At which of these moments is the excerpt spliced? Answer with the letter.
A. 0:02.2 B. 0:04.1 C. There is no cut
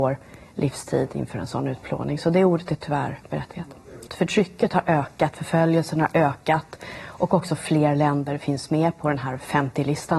B